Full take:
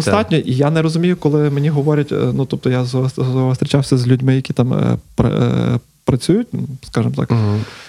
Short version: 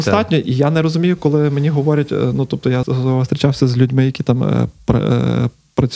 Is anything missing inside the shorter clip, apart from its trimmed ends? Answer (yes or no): yes